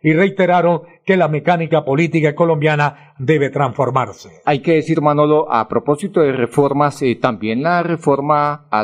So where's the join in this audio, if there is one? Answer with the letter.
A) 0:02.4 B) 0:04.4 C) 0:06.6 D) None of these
B